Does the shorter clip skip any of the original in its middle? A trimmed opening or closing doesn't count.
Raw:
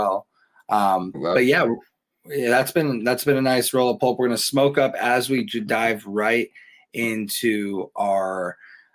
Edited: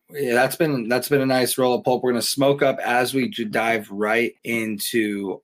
yes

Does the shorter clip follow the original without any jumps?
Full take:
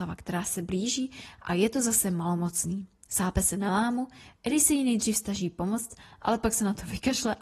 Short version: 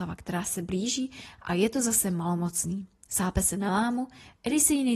yes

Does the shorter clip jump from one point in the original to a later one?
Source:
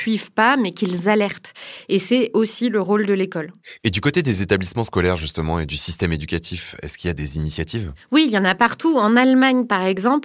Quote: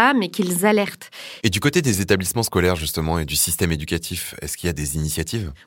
yes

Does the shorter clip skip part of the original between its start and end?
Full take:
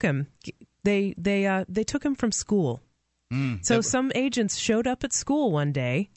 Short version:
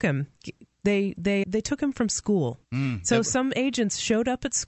yes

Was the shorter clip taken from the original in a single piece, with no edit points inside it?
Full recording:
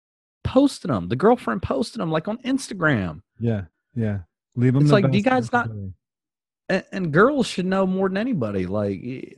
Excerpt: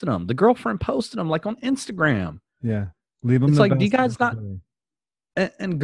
no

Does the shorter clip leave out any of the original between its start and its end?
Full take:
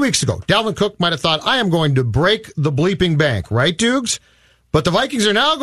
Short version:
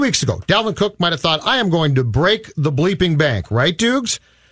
no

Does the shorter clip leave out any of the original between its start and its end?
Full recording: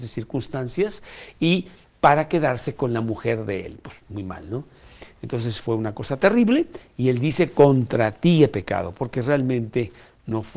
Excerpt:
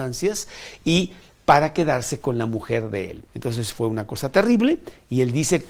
yes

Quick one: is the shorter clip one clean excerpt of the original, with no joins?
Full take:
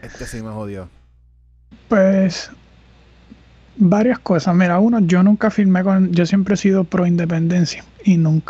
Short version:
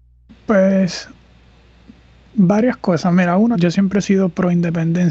no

